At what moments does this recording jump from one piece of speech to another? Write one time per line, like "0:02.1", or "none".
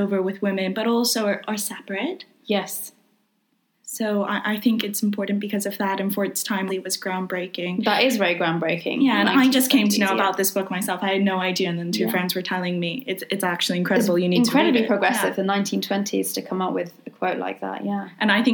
0:06.7